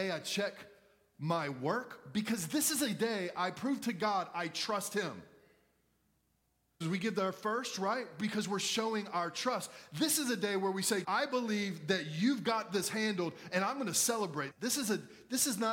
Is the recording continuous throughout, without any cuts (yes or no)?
no